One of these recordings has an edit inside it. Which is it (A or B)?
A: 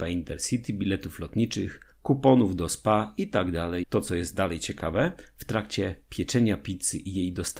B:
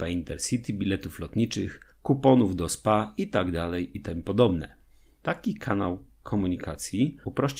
A